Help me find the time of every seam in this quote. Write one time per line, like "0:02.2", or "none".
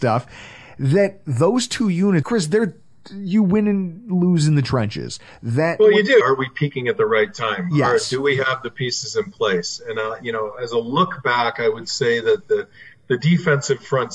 0:02.2
0:06.2